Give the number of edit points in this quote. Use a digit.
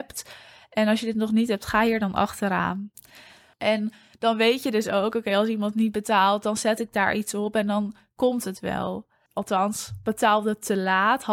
2